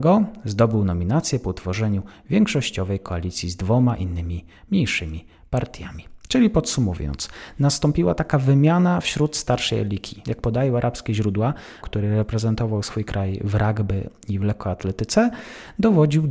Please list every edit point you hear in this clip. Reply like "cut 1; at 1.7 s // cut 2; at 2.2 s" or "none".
cut 1; at 10.2 s // cut 2; at 11.8 s